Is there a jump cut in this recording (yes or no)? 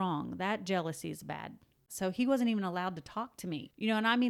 yes